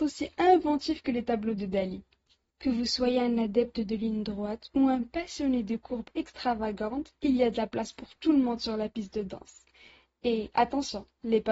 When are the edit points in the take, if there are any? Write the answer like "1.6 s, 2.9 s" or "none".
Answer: 2.5 s